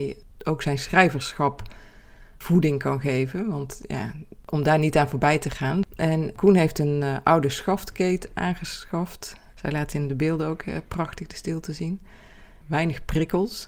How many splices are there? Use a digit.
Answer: 2